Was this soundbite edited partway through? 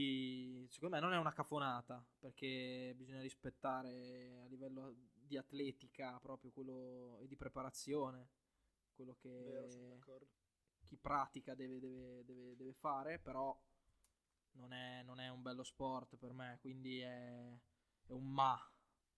no; 0 cuts

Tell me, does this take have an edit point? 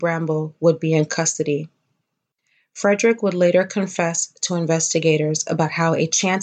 no; 0 cuts

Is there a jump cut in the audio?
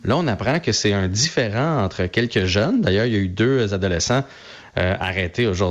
no; 0 cuts

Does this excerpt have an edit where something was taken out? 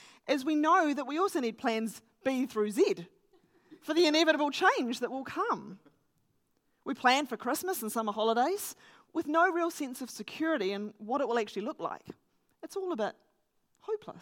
no; 0 cuts

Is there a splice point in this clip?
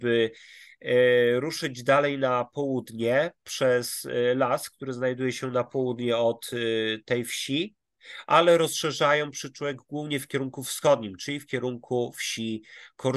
no; 0 cuts

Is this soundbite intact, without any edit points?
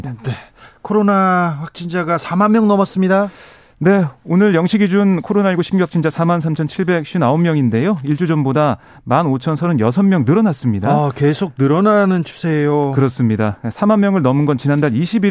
yes; 0 cuts

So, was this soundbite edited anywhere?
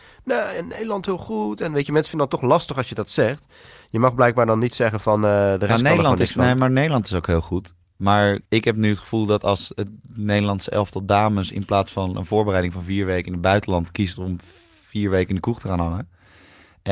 yes; 1 cut; at 8.4 s

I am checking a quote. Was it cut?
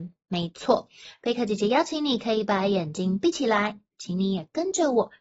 yes; 2 cuts; at 1.1 s, 3.9 s

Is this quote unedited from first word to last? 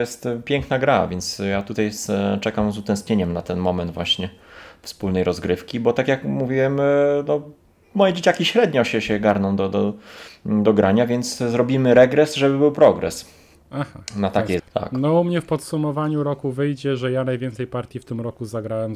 no; 1 cut; at 14.6 s

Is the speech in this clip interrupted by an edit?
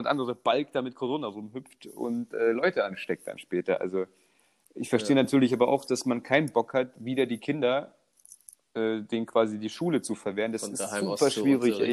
no; 0 cuts

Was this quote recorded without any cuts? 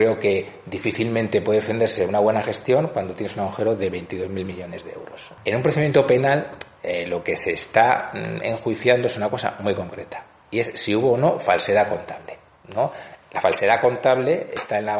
yes; 0 cuts

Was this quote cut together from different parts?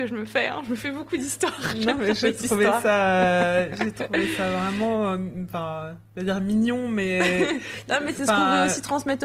no; 0 cuts

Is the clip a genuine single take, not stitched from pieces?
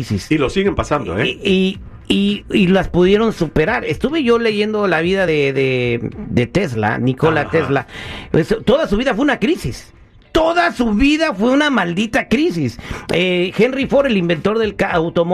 yes; 0 cuts

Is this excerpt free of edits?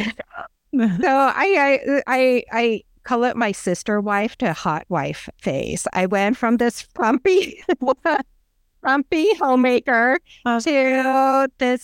yes; 0 cuts

